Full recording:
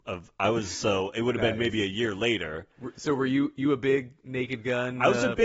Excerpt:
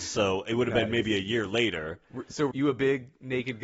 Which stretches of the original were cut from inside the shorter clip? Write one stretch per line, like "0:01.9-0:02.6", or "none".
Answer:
0:03.2-0:03.5